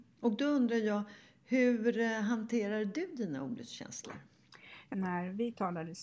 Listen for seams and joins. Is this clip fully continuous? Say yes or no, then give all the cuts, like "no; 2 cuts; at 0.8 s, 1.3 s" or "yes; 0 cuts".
no; 1 cut; at 4.9 s